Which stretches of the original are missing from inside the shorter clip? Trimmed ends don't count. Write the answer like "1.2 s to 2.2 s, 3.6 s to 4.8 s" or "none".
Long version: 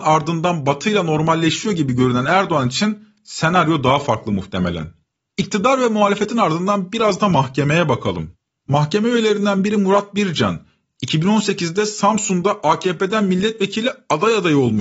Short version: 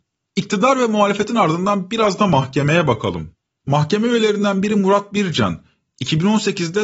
none